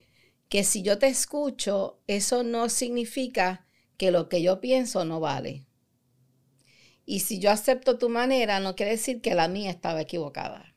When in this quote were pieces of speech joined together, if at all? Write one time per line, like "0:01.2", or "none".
none